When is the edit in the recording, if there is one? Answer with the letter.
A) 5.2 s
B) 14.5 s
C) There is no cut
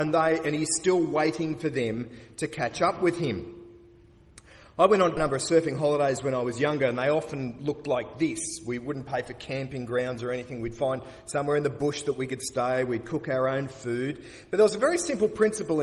A